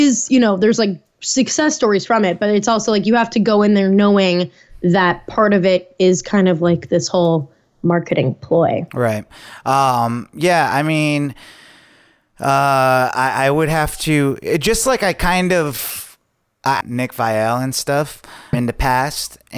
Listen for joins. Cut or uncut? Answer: cut